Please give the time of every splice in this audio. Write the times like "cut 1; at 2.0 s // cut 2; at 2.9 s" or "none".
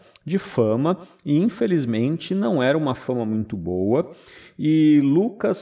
none